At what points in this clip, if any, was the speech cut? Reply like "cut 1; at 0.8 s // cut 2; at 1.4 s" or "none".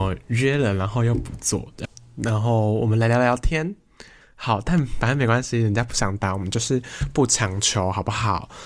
cut 1; at 1.8 s // cut 2; at 4.2 s